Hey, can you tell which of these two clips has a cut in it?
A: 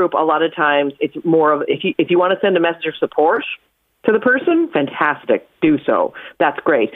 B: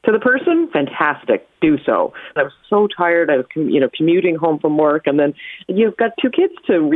B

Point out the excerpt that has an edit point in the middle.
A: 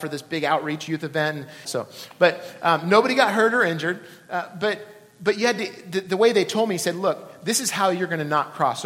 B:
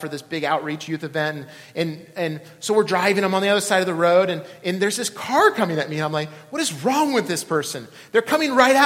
A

